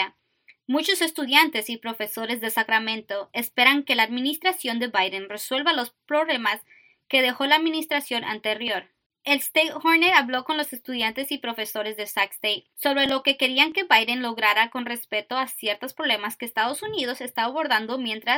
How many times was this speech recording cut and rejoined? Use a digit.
1